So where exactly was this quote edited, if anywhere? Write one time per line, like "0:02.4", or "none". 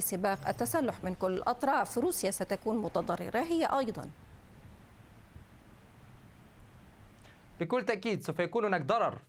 none